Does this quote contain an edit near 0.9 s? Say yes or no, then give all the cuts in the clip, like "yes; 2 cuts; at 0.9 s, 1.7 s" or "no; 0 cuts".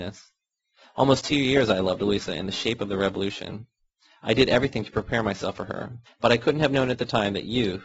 no; 1 cut; at 6.1 s